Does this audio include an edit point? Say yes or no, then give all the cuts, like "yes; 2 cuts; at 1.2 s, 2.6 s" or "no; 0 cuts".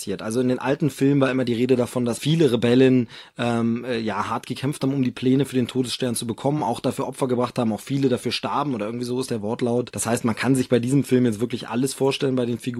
no; 0 cuts